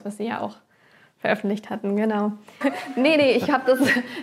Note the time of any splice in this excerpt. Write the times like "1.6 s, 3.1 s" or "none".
2.6 s